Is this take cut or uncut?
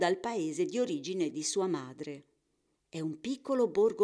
cut